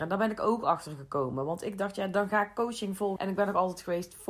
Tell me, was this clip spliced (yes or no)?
yes